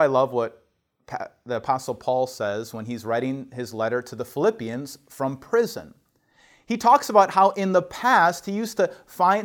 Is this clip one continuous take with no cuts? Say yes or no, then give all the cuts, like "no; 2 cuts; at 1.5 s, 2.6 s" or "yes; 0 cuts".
yes; 0 cuts